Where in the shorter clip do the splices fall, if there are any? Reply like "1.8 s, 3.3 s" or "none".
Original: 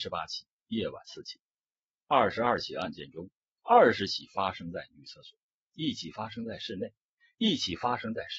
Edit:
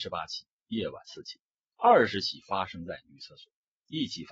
1.7 s